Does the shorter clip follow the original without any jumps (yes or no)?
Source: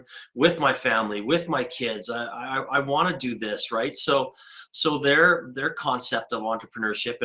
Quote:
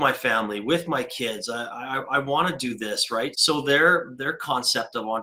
no